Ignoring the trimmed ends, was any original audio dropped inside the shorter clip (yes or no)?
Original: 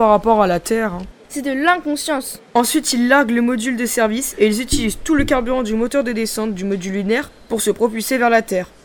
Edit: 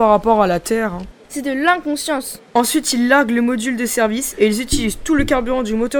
no